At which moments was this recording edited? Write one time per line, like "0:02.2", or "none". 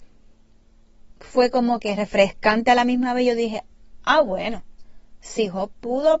none